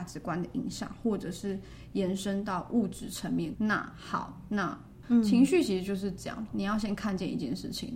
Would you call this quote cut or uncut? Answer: cut